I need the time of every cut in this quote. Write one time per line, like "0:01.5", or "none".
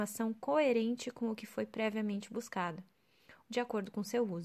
0:03.4